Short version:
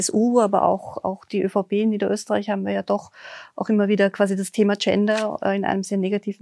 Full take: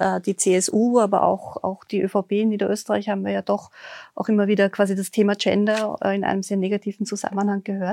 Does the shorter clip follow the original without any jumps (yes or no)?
yes